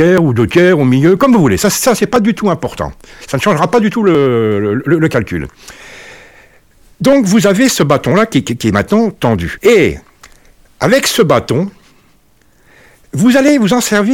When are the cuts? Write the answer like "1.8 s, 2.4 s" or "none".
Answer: 9.6 s